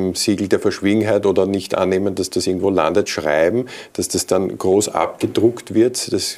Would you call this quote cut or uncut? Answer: uncut